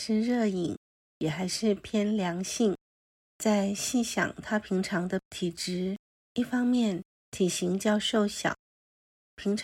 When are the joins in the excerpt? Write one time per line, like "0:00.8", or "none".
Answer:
0:03.2